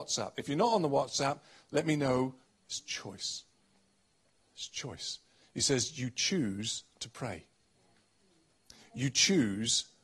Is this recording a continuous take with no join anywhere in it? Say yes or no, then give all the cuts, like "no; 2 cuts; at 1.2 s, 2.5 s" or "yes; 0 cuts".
no; 1 cut; at 2.5 s